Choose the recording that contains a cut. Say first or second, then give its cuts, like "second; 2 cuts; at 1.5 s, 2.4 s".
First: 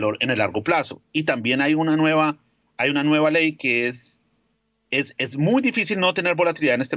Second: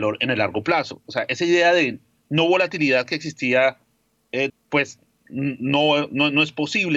second; 2 cuts; at 1.0 s, 4.5 s